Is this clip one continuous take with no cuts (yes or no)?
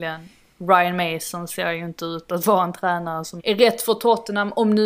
no